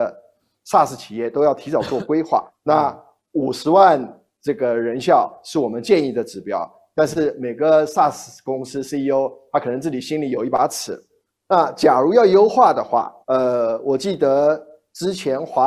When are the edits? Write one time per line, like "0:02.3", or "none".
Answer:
0:02.5
0:11.3
0:13.2